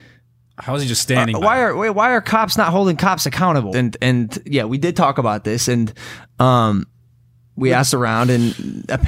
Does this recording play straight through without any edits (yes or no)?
no